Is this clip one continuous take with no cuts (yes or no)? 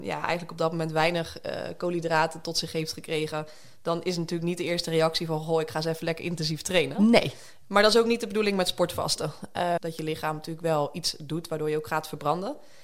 no